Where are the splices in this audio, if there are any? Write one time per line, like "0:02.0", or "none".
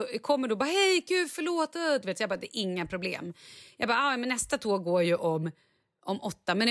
none